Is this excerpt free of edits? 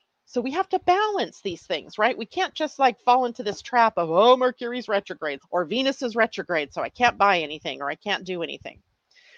no; 1 cut; at 5.4 s

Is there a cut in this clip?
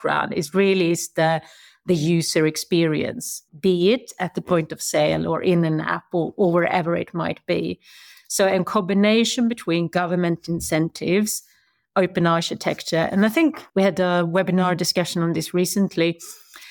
yes; 1 cut; at 3.5 s

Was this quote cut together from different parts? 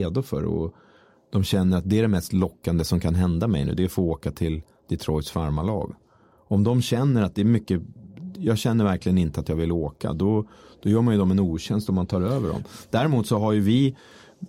no; 0 cuts

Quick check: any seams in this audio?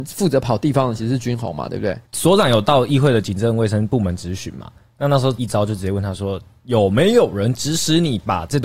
yes; 1 cut; at 2.0 s

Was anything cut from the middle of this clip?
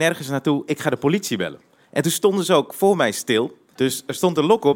yes; 1 cut; at 3.7 s

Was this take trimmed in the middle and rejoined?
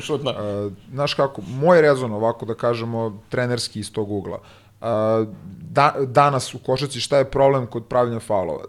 no; 0 cuts

